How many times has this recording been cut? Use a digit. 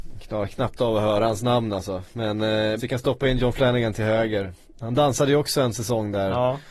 1